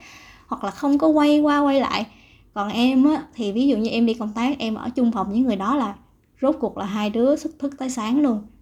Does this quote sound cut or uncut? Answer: uncut